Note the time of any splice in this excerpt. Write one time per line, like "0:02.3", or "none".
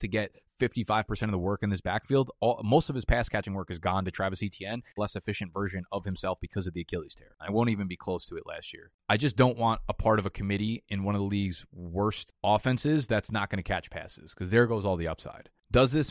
0:05.0
0:07.4